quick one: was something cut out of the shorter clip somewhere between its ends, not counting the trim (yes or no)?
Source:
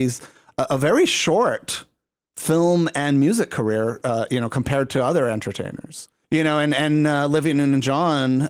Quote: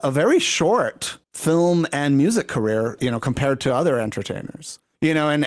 yes